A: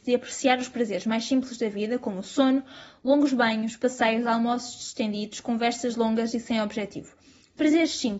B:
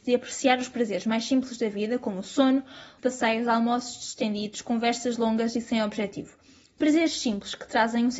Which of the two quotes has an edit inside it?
B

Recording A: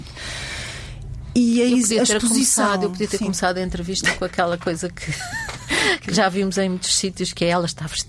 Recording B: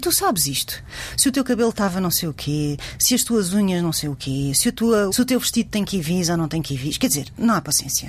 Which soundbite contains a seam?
B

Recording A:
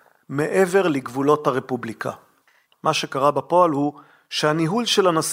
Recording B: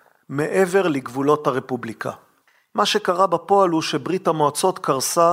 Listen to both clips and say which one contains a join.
A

